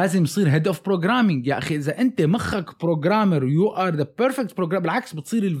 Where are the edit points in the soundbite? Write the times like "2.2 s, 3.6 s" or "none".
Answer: none

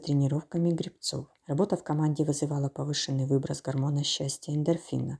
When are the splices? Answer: 1.4 s

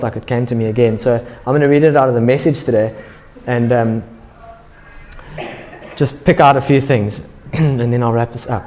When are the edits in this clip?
none

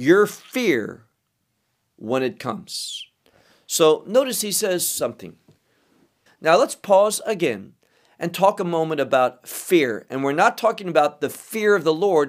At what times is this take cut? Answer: 6.3 s

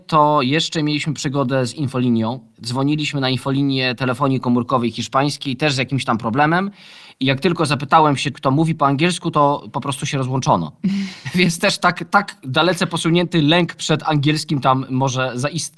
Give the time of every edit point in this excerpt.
8.3 s

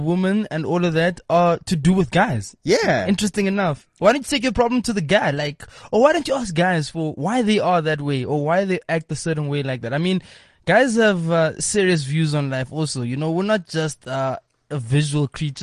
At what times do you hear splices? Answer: none

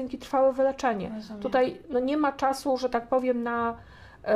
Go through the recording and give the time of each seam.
none

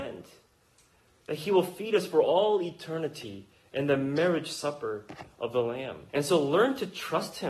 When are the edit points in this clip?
6.1 s

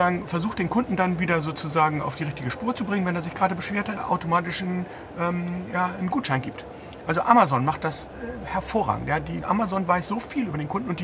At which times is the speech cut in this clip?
4.0 s, 9.4 s

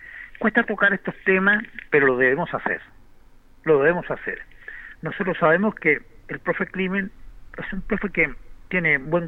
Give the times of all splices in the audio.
4.9 s

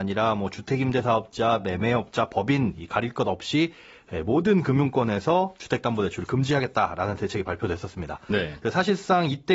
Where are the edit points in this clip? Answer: none

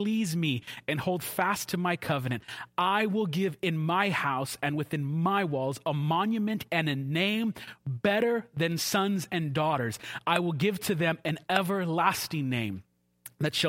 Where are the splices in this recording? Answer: none

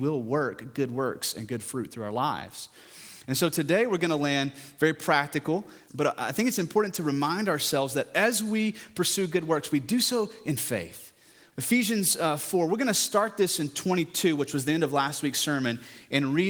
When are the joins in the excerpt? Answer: 5.9 s, 11.5 s

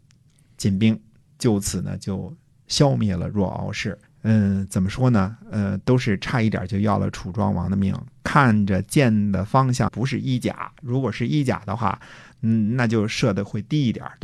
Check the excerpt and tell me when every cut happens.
4.1 s, 9.9 s

